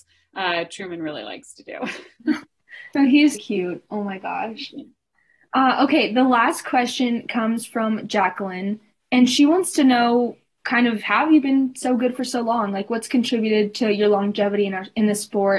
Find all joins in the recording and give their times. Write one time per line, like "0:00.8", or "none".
0:03.3

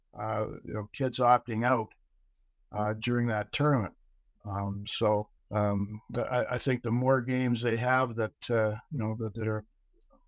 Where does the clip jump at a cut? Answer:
0:05.4

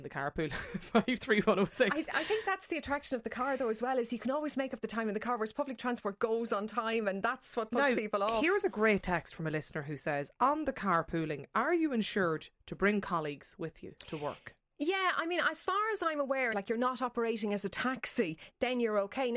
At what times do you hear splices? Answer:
0:14.0
0:16.5

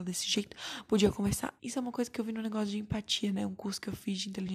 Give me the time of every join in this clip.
0:01.6

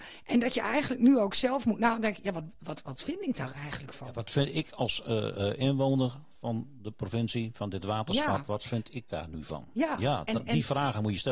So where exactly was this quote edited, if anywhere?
none

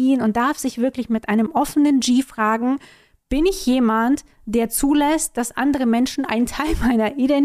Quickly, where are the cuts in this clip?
none

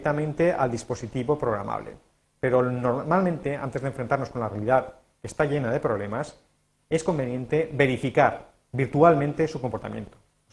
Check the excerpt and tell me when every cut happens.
none

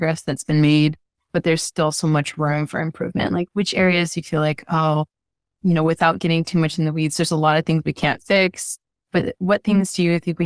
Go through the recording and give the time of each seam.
none

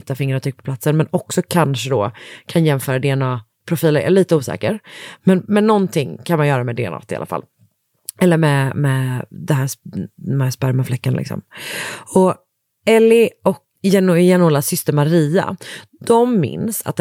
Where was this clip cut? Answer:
0:13.8

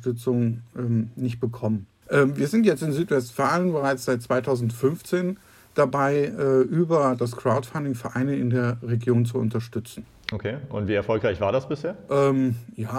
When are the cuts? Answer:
0:02.0

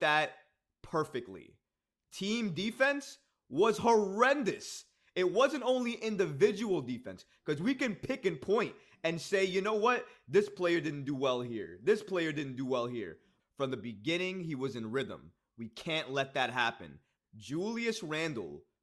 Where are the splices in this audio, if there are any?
0:13.4
0:17.2

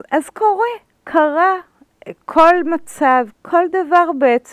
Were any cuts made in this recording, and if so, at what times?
0:03.3

